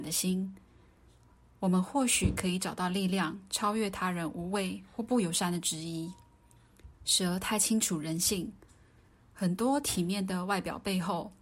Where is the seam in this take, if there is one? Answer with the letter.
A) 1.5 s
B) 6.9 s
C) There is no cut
B